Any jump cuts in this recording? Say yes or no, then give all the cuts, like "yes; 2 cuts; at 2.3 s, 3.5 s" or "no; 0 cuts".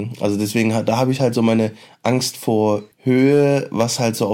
yes; 1 cut; at 2.9 s